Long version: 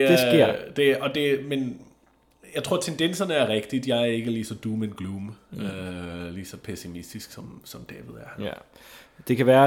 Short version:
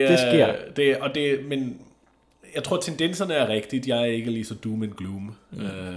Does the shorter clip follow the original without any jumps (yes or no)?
yes